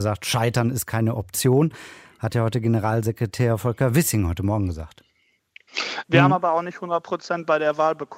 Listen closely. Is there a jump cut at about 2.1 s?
no; 1 cut; at 6.0 s

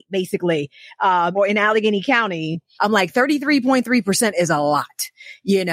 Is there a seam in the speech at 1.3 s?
yes; 2 cuts; at 1.3 s, 2.7 s

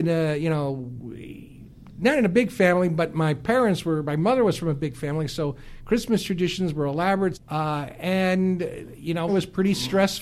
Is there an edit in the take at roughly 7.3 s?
yes; 2 cuts; at 7.3 s, 9.3 s

